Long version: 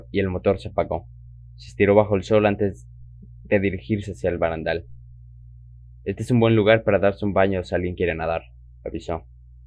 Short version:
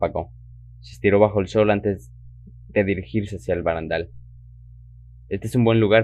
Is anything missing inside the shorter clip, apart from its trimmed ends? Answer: no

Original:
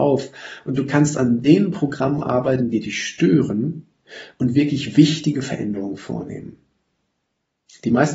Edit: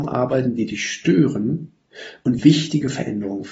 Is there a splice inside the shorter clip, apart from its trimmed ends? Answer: yes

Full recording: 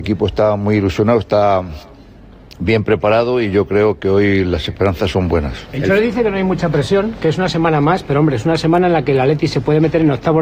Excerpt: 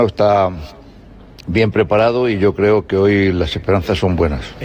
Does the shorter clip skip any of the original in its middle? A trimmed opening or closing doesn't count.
no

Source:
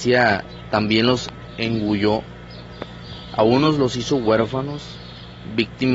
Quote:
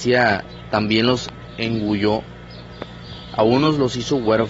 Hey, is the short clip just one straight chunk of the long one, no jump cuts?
yes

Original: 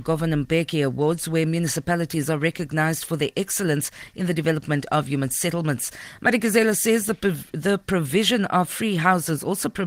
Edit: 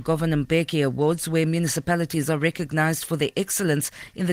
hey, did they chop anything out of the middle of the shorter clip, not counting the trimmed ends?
no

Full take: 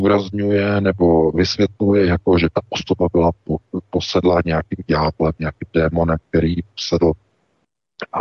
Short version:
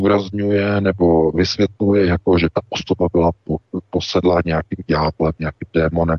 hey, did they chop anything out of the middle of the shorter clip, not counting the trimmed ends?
no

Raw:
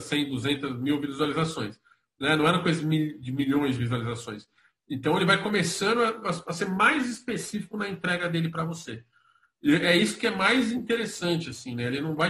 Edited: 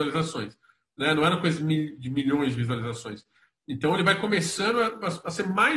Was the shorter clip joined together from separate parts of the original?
no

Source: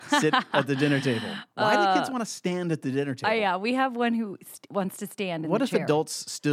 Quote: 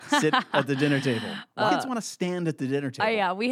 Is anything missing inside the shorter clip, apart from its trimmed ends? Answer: yes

